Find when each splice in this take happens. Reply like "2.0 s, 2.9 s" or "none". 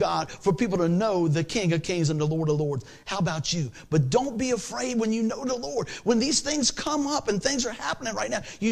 none